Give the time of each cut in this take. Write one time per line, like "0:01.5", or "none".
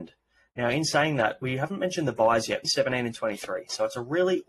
0:02.6